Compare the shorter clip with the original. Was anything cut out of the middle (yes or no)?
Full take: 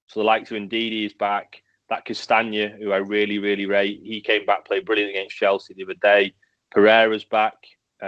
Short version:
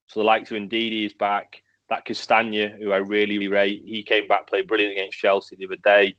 yes